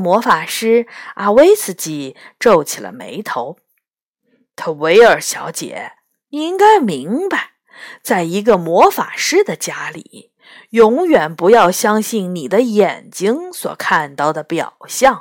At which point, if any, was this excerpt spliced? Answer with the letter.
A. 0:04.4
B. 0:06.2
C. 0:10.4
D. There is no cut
D